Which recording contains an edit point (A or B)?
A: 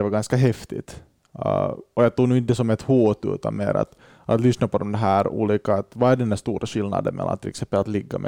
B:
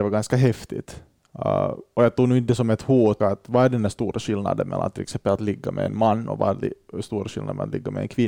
B